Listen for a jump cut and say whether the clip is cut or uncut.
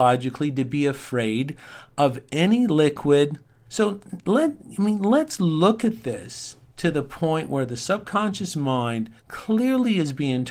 cut